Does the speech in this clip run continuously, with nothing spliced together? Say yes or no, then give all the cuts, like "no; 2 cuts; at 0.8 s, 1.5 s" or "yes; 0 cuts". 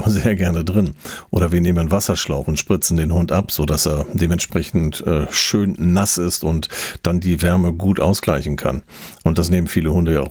yes; 0 cuts